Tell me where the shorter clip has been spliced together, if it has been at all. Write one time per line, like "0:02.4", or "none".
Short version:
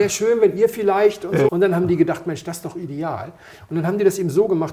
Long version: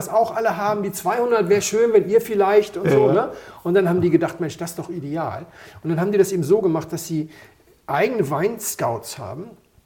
0:01.5